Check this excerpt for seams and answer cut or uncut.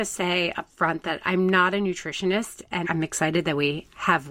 cut